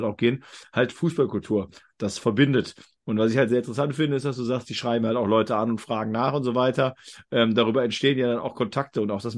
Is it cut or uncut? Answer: uncut